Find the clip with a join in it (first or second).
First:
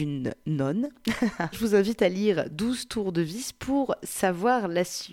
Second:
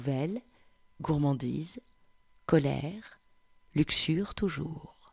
first